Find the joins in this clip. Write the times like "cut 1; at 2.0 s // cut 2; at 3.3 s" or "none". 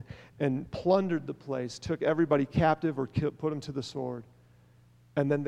none